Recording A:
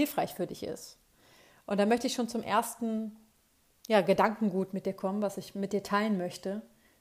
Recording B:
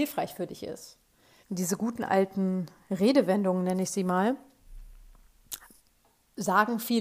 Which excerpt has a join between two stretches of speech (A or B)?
B